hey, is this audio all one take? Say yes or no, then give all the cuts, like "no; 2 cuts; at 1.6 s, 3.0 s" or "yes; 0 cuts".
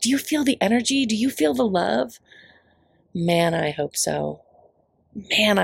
yes; 0 cuts